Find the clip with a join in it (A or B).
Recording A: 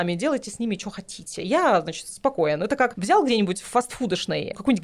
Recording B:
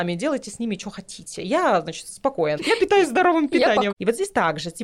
B